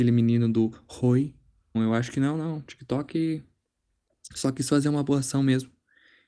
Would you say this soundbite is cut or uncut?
cut